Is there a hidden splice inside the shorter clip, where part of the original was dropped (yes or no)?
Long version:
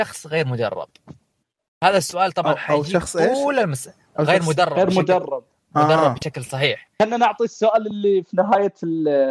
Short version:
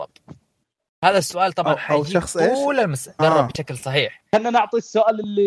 yes